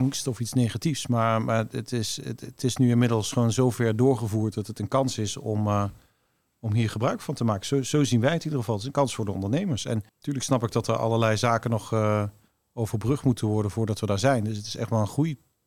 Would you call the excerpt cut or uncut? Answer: cut